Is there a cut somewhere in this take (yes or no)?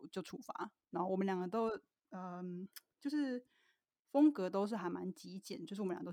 no